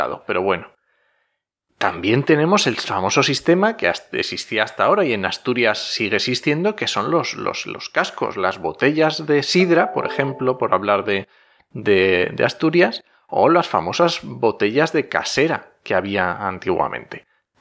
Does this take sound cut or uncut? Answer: uncut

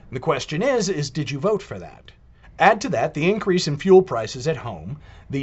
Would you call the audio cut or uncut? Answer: cut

